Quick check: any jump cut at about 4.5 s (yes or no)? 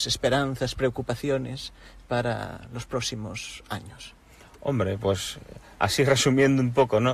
no